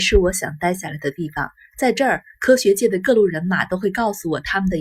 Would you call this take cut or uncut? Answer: uncut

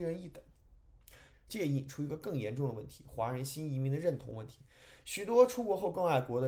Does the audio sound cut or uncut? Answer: cut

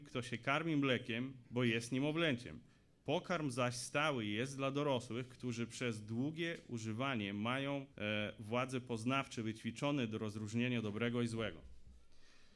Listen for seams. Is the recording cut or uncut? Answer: cut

